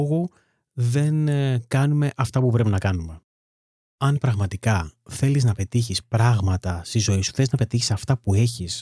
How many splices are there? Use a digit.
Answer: 0